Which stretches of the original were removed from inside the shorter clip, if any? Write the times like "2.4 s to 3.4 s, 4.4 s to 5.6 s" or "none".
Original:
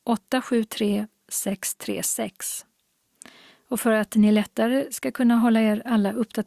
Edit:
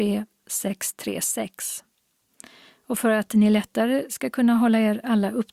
none

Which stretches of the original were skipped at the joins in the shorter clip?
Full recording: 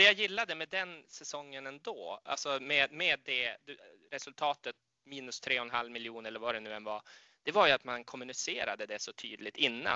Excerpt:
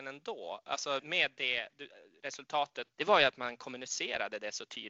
2.6 s to 2.9 s, 4.8 s to 7.4 s

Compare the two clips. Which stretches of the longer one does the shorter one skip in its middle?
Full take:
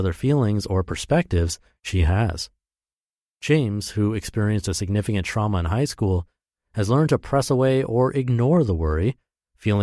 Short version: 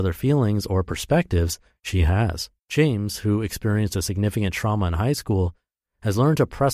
2.6 s to 3.3 s

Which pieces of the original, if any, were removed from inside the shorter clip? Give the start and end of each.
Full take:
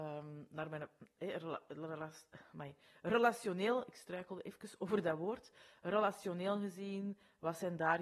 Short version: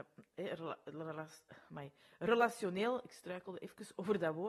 none

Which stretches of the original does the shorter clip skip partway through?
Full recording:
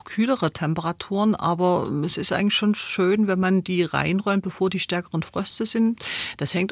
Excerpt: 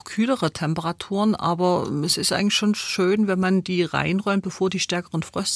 none

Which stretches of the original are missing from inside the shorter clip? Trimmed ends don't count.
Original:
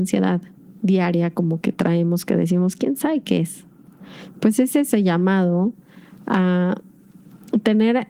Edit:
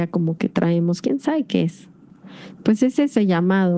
2.2 s to 2.8 s

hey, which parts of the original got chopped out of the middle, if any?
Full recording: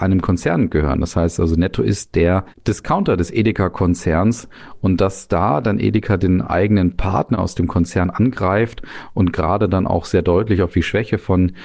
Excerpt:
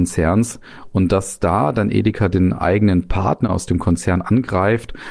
none

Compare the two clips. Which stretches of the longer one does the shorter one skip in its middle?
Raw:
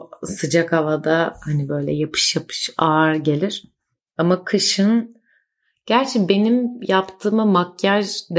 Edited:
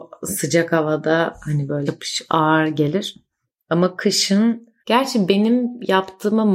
1.9 s to 2.3 s, 5.3 s to 5.8 s

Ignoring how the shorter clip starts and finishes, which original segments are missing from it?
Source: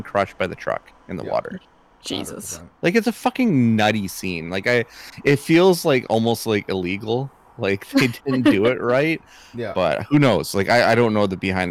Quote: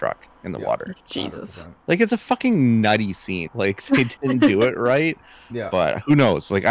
1.6 s to 1.9 s, 4.4 s to 7.5 s

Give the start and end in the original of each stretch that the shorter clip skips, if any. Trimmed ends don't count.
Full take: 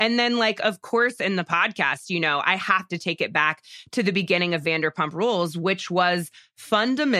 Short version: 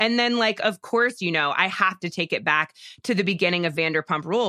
1.2 s to 2.0 s

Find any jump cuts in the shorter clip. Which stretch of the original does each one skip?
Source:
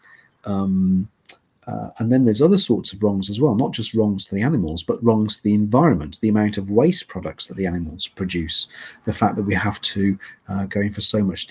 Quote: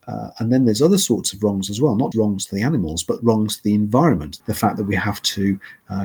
3.7 s to 3.9 s, 6.2 s to 9.0 s

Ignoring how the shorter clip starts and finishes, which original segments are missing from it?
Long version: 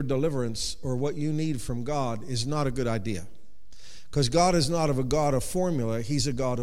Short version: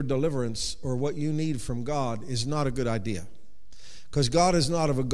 none

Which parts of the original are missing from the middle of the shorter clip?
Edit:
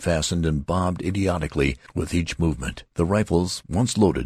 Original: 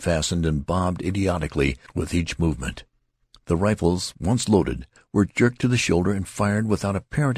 2.9 s to 3.4 s

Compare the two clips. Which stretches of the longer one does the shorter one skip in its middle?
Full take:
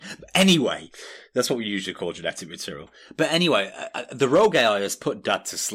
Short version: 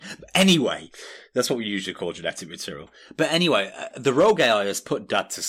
3.9 s to 4.1 s

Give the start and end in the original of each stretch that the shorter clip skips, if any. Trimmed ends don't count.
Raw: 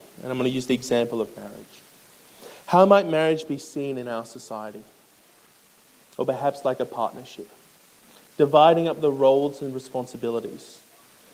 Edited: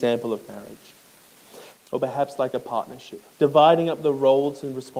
2.6 s to 6.0 s, 7.6 s to 8.3 s

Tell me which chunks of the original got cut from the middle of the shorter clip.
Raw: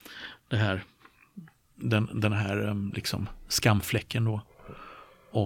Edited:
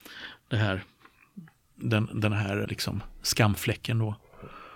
2.7 s to 2.9 s

